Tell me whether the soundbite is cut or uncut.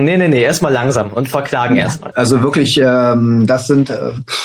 cut